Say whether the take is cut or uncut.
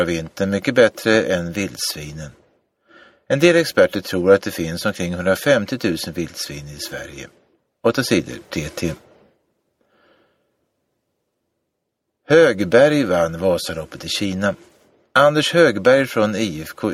uncut